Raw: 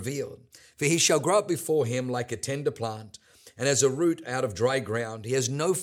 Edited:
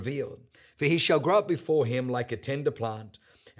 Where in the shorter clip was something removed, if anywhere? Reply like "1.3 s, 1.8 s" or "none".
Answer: none